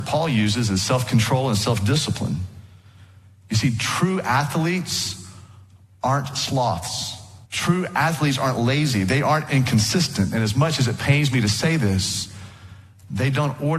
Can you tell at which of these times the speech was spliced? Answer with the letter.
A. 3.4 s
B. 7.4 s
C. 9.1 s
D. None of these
B